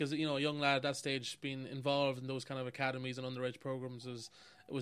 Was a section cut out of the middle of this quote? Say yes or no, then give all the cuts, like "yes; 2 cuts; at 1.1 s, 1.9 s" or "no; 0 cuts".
no; 0 cuts